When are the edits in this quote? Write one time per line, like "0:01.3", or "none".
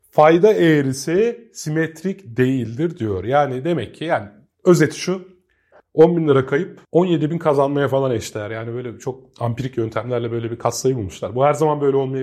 0:05.8